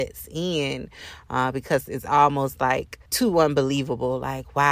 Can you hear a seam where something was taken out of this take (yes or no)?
yes